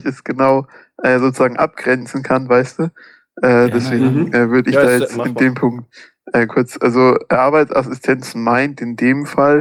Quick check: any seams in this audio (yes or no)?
no